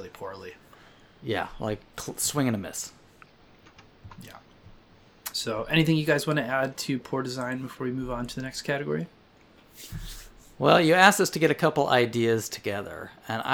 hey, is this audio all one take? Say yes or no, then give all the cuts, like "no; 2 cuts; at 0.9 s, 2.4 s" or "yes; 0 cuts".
yes; 0 cuts